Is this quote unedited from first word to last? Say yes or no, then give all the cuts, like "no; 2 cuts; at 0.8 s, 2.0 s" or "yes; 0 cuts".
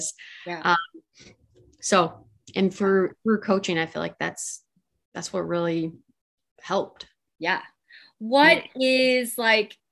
yes; 0 cuts